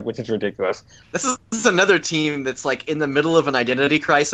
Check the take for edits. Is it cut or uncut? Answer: cut